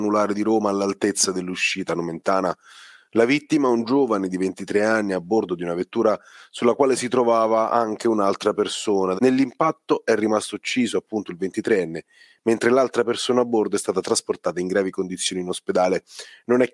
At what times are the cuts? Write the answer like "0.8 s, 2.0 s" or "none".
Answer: 9.2 s